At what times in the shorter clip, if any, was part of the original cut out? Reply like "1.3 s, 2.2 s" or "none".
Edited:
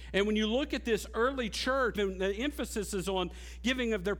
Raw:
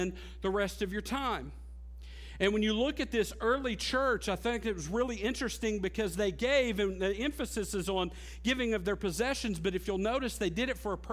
1.9 s

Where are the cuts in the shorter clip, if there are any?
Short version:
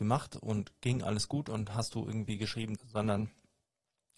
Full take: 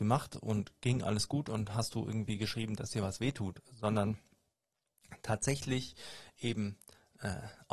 2.8 s

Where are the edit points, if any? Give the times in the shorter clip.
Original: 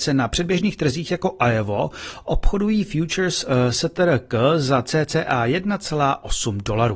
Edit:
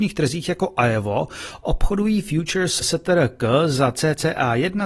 2.8 s

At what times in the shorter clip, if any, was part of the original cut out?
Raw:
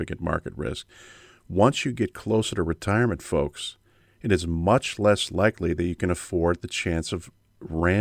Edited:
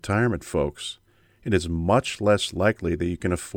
none

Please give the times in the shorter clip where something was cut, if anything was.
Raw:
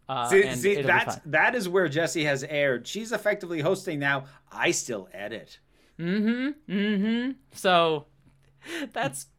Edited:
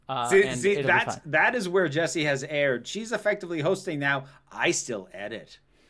none

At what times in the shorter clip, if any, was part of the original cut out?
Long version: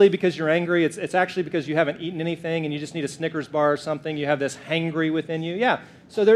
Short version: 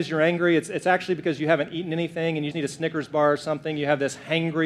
2.5 s

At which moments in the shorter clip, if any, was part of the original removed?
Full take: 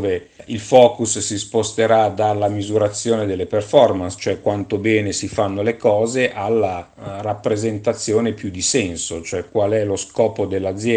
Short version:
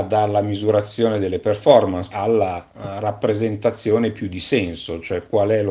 2.1 s

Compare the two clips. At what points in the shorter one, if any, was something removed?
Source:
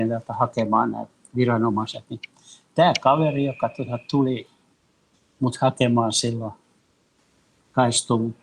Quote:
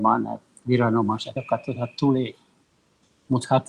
1.4 s

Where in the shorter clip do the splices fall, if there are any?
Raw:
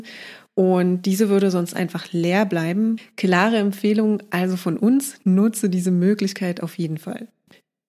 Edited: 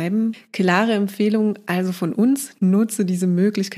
none

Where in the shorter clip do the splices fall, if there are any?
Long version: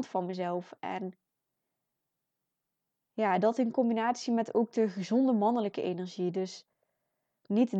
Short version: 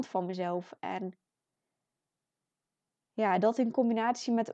none

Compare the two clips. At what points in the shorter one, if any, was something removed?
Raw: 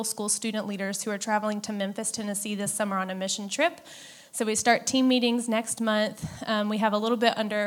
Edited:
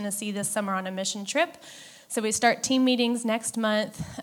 none

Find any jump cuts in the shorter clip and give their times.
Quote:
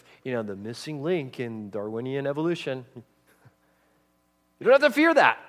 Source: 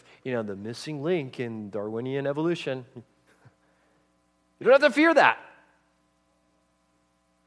none

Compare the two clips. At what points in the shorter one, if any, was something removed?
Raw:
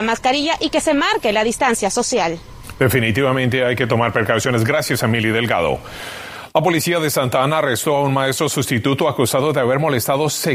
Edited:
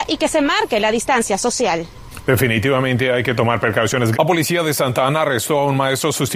4.1 s

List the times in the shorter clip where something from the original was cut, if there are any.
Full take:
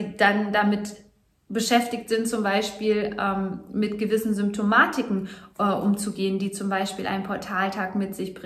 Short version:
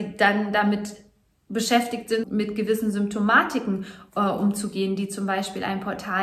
2.2 s

